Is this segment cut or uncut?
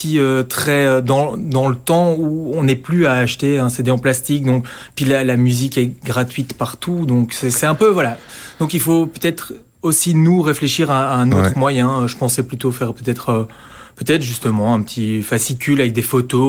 uncut